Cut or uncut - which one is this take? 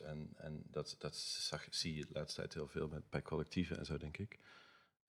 uncut